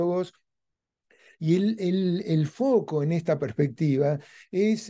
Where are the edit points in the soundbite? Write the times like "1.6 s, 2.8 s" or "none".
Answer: none